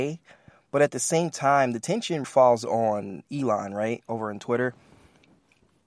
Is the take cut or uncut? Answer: cut